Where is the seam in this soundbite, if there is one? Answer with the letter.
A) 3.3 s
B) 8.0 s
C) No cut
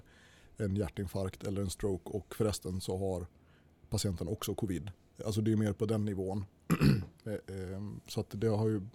C